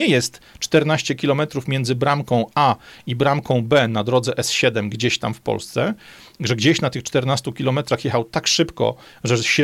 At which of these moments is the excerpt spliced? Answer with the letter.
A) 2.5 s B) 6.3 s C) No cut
A